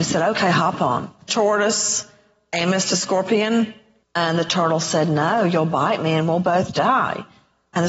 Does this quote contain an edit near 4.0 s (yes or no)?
yes